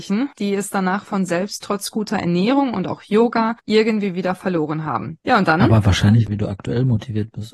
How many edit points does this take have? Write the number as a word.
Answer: two